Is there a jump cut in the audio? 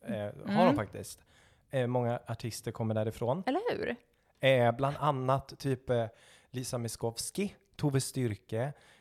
no; 0 cuts

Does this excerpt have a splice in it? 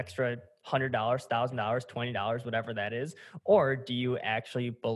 no; 0 cuts

